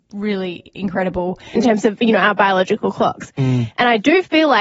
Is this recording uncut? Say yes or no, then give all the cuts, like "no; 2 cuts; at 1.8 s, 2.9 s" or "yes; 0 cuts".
no; 1 cut; at 1.6 s